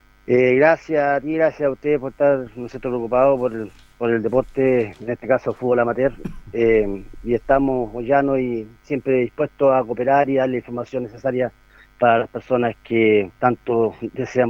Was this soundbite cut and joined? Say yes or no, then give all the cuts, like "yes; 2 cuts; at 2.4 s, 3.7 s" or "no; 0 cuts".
no; 0 cuts